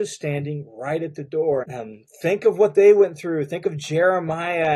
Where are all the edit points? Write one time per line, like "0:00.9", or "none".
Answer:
0:01.6

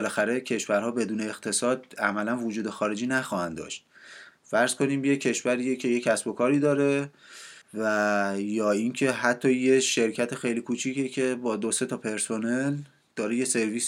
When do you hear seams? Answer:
0:07.6

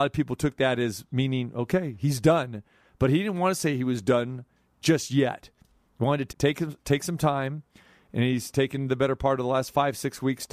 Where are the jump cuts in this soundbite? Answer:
0:06.3

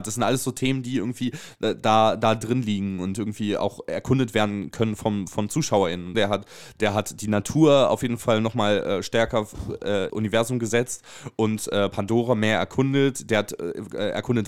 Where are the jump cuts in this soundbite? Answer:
0:06.1
0:10.1

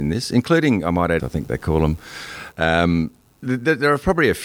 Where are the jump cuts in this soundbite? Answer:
0:01.2
0:02.5

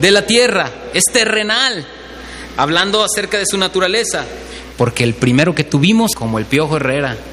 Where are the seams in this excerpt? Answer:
0:04.7
0:06.1

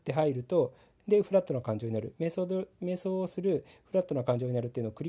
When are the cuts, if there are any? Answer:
none

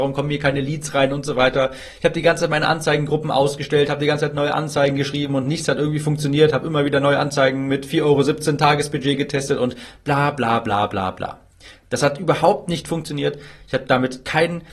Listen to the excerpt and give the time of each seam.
none

